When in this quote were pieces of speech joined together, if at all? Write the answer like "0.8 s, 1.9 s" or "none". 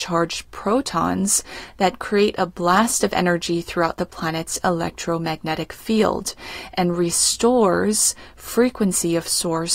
none